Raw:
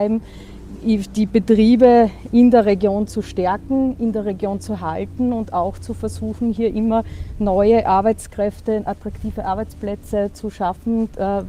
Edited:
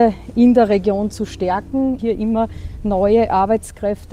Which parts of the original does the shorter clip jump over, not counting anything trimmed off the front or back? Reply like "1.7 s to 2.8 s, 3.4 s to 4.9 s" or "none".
4.0 s to 6.5 s

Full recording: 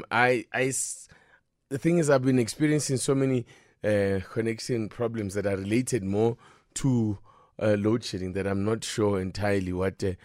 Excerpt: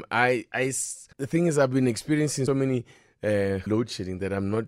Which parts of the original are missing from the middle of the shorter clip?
1.1 s to 1.6 s, 3.0 s to 3.1 s, 4.3 s to 7.8 s

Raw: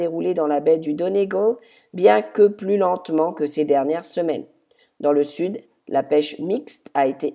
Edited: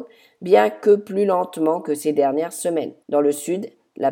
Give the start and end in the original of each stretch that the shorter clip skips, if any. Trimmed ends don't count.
4.5 s to 4.9 s

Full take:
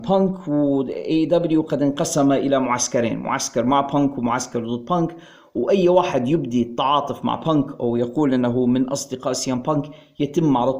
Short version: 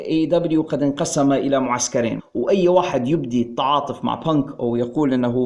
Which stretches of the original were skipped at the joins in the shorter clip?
3.2 s to 5.4 s

